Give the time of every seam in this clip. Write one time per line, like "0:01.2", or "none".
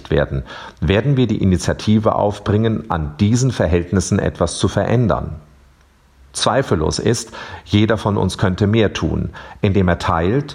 none